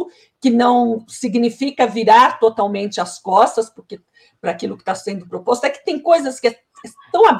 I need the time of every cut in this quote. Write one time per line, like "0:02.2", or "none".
none